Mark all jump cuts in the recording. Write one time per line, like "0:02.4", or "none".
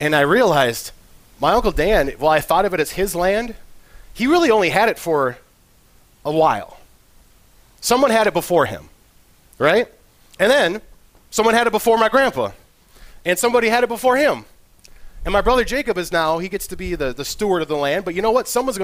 none